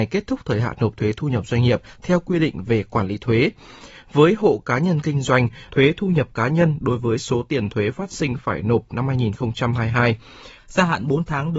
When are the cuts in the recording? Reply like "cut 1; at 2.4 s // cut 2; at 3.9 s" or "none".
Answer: cut 1; at 5.7 s // cut 2; at 10.6 s